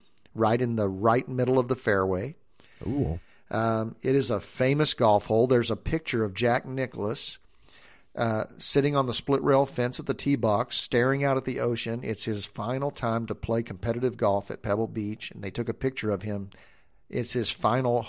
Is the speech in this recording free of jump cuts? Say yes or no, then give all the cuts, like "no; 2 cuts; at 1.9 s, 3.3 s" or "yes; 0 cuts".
yes; 0 cuts